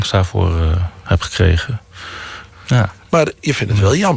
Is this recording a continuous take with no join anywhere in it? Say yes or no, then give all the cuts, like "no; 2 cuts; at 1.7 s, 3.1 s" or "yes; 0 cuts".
no; 1 cut; at 2.5 s